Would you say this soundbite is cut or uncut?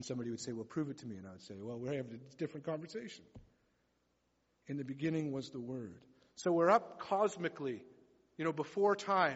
uncut